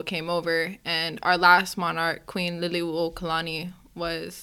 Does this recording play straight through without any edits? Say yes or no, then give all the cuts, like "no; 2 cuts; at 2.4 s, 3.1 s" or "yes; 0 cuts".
yes; 0 cuts